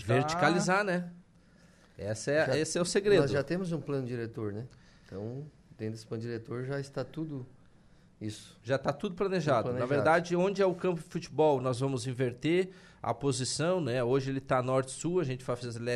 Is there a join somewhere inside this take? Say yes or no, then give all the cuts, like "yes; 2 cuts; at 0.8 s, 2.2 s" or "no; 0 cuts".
no; 0 cuts